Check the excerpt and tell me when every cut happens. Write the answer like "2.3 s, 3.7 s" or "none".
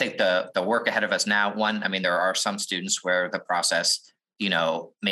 none

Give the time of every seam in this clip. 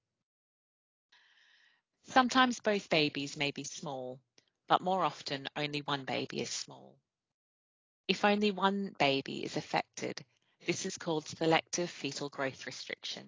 1.9 s

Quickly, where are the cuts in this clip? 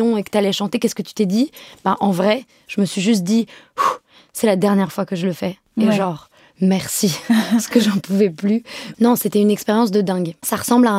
none

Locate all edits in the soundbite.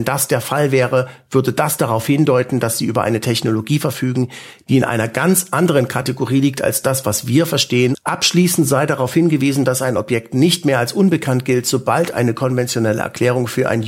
7.9 s

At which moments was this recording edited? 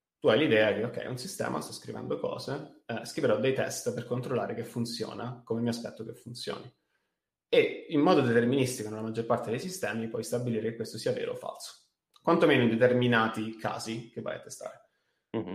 none

